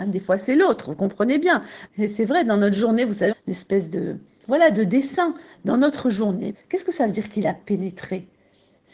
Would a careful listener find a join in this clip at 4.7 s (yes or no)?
no